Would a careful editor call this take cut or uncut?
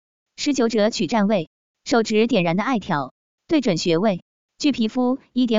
uncut